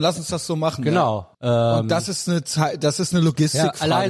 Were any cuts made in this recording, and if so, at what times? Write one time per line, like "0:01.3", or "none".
0:01.3